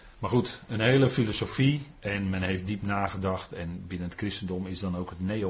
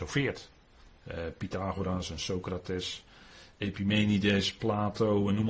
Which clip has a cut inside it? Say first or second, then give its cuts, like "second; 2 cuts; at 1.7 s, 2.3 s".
second; 1 cut; at 1.0 s